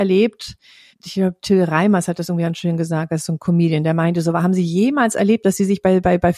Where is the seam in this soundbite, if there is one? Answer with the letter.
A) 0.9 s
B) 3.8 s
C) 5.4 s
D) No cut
A